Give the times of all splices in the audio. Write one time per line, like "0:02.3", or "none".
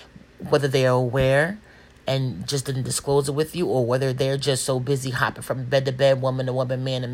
none